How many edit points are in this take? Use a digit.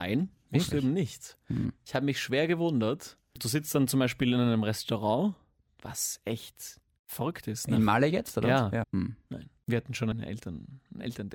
1